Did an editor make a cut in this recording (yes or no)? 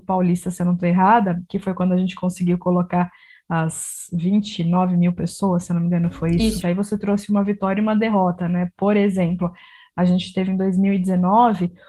yes